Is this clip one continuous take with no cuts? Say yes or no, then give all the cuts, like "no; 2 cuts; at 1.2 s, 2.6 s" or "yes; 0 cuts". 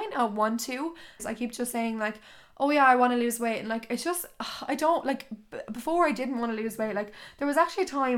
no; 1 cut; at 1.2 s